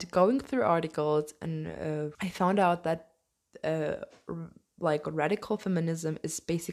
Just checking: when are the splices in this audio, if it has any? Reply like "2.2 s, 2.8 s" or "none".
2.1 s

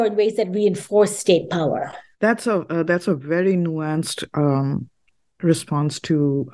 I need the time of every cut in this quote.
2.1 s

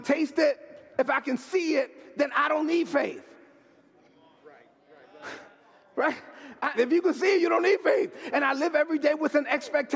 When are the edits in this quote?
0.9 s, 6.7 s, 8.3 s

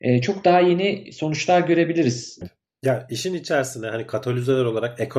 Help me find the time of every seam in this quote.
2.4 s

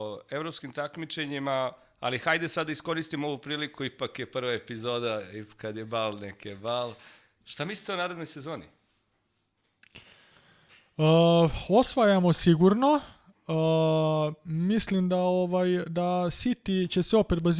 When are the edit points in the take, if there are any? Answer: none

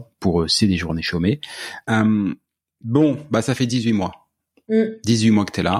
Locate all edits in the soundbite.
1.8 s

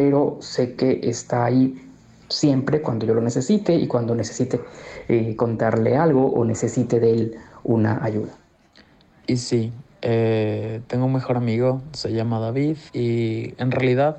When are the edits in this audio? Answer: 12.9 s

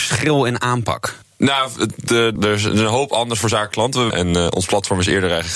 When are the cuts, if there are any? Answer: 2.4 s, 4.1 s

